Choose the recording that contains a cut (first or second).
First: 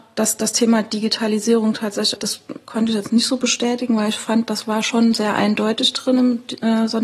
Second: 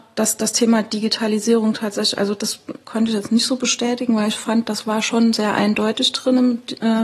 first